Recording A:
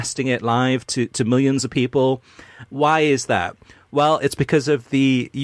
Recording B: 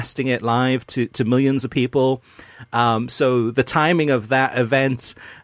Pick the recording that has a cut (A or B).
A